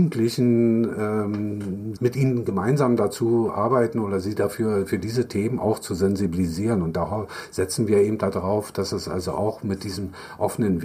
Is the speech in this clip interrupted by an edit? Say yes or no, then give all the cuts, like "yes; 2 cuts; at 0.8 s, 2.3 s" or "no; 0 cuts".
yes; 1 cut; at 2.0 s